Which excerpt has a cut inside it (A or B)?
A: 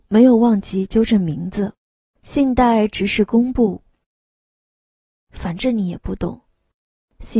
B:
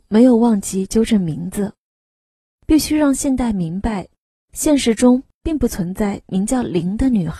A